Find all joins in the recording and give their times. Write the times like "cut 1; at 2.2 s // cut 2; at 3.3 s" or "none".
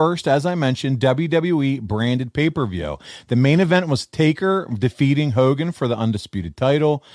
none